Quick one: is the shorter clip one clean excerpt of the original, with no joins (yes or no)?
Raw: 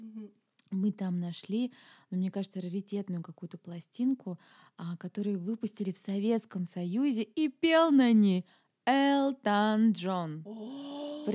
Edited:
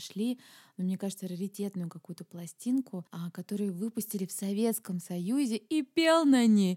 no